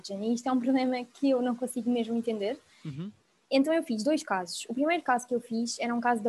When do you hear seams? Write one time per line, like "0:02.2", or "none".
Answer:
none

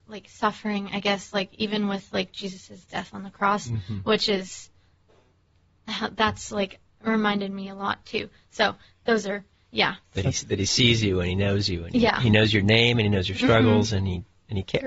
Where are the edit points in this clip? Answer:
0:10.0

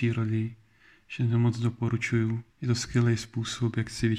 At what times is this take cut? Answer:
0:02.5

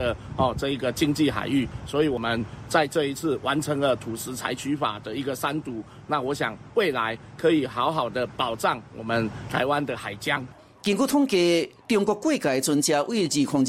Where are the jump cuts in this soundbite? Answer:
none

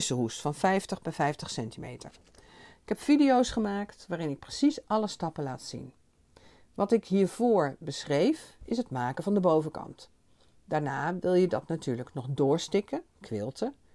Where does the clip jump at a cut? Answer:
none

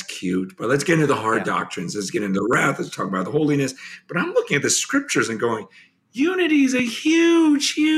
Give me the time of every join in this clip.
none

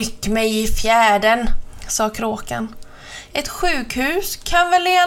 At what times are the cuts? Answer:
0:03.3

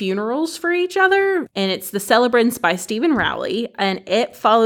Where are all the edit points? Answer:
0:01.5

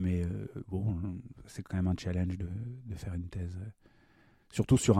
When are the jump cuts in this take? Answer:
0:01.7

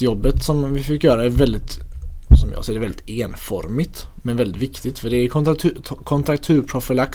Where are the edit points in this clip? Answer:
none

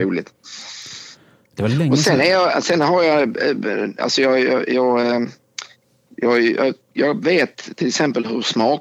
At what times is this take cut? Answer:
none

